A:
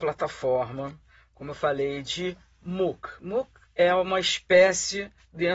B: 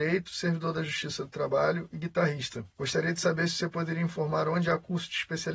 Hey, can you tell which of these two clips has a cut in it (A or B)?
B